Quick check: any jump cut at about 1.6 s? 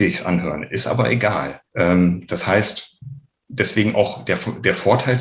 yes; 1 cut; at 1.6 s

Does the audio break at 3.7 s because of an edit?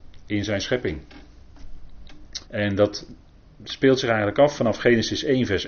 no; 1 cut; at 2.4 s

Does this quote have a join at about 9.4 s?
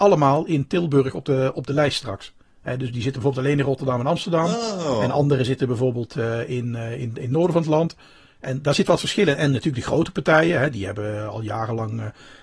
no; 0 cuts

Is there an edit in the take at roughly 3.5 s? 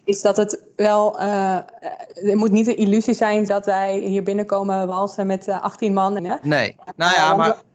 yes; 2 cuts; at 3.5 s, 6.2 s

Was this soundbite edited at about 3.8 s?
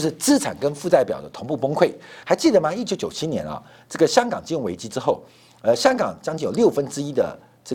no; 1 cut; at 2.2 s

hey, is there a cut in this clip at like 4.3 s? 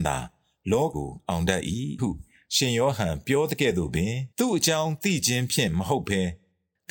yes; 2 cuts; at 0.9 s, 4.3 s

